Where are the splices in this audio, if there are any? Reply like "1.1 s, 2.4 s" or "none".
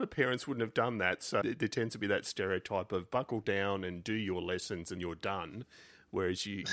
1.4 s, 5.0 s